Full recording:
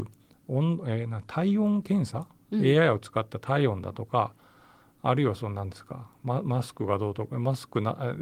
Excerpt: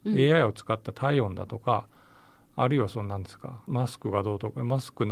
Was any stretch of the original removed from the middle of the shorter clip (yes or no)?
yes